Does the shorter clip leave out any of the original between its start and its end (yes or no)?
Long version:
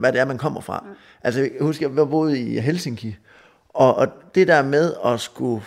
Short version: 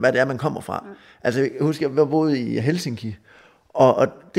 no